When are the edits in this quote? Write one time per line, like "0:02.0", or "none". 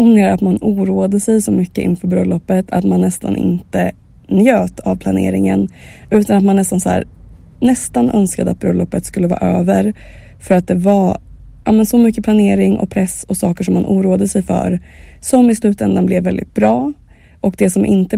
none